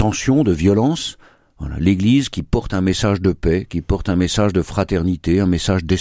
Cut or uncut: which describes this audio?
uncut